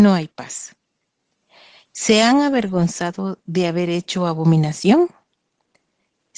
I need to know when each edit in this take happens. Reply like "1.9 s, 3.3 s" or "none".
none